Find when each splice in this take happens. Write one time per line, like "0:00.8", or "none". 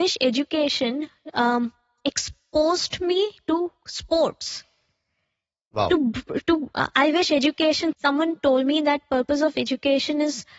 0:07.9

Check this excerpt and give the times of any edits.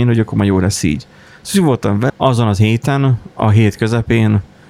0:02.1

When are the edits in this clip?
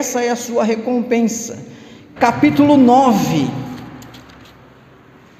0:02.2

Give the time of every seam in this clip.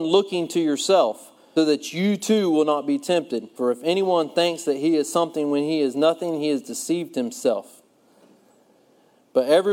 0:01.6
0:03.6

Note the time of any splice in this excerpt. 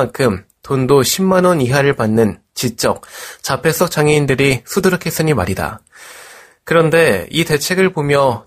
none

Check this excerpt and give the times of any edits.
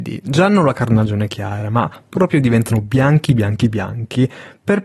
none

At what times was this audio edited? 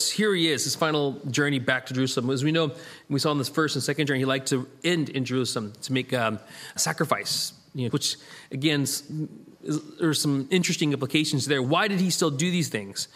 0:06.8
0:07.9
0:11.6

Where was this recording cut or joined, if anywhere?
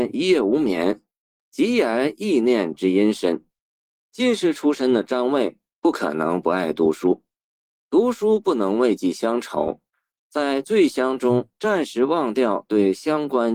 0:03.9
0:10.2

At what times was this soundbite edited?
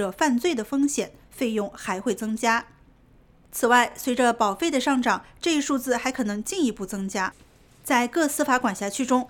none

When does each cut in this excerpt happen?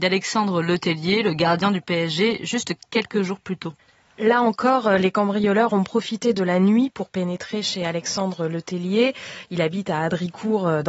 none

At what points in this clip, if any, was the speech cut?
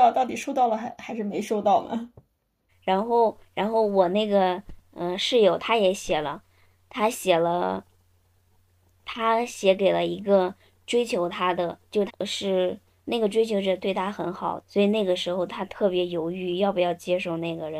0:02.7
0:12.1
0:14.6

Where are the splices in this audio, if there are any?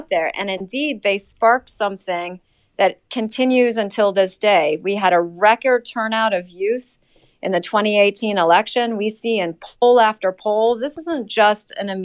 none

